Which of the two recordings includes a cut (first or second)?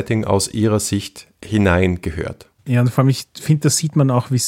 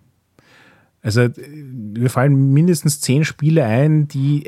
first